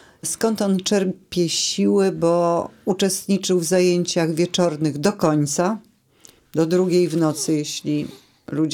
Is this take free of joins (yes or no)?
yes